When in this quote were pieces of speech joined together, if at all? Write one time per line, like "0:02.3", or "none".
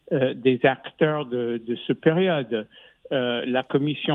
none